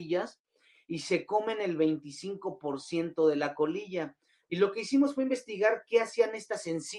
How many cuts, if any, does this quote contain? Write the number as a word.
one